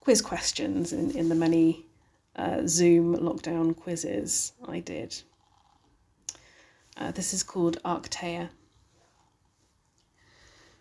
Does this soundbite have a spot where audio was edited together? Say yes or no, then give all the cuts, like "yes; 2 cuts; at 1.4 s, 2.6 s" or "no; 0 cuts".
no; 0 cuts